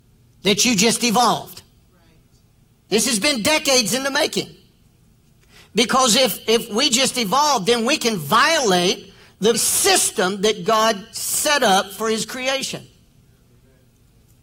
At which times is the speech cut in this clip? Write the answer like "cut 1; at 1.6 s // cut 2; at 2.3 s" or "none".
cut 1; at 9.5 s